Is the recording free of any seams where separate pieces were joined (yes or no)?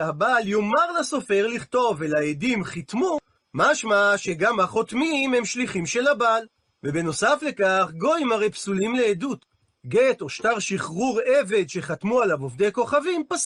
no